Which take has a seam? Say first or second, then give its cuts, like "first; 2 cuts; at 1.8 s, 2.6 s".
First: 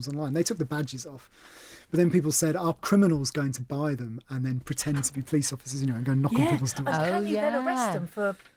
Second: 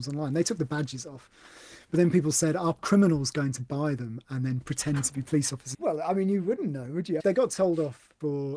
second; 2 cuts; at 5.7 s, 7.2 s